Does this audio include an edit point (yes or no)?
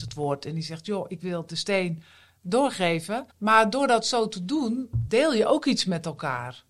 yes